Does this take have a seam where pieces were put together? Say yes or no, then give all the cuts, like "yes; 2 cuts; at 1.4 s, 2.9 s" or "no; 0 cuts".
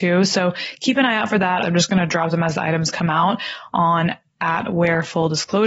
yes; 1 cut; at 1.6 s